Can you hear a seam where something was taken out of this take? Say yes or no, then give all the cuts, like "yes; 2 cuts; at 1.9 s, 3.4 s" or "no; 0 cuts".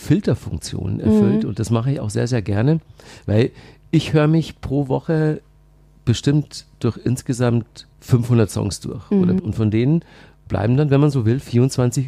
yes; 2 cuts; at 7.9 s, 9.4 s